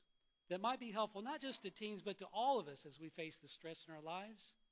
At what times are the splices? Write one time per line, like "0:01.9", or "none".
none